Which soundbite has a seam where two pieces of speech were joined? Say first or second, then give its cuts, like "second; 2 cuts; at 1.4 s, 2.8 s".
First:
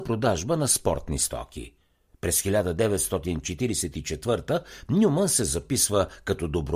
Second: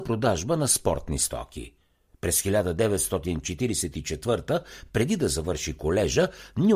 first; 1 cut; at 4.9 s